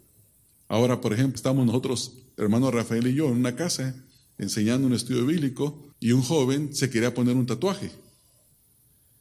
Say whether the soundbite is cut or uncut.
cut